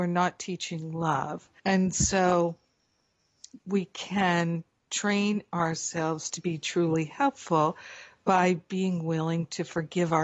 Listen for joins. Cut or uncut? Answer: cut